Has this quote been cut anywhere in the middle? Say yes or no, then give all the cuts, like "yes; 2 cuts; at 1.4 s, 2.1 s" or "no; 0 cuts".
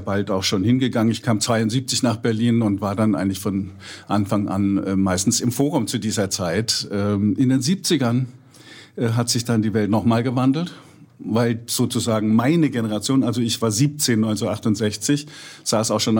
no; 0 cuts